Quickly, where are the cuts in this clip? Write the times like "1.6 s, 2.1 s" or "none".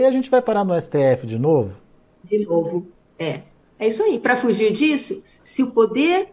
none